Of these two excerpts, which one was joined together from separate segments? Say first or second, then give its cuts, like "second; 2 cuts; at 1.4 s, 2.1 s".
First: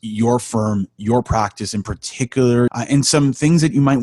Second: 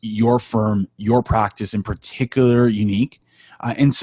first; 1 cut; at 2.7 s